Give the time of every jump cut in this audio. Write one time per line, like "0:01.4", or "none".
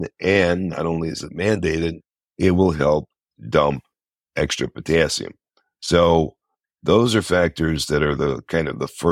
none